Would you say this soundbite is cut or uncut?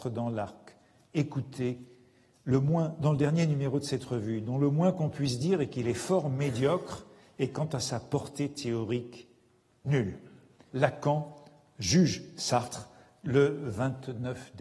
cut